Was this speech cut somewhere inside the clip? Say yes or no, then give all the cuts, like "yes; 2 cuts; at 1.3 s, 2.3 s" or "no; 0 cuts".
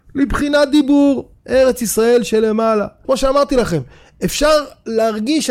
yes; 2 cuts; at 1.4 s, 3.0 s